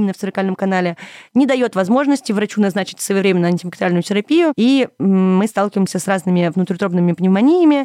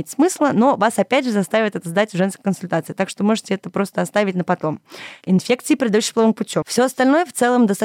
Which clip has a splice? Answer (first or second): second